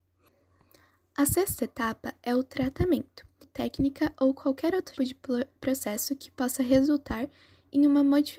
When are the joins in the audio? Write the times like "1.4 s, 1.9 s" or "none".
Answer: 3.4 s, 5.0 s